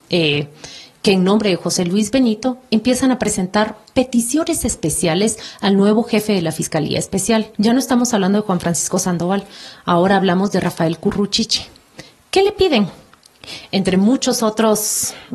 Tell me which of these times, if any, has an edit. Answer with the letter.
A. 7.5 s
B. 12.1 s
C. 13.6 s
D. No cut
A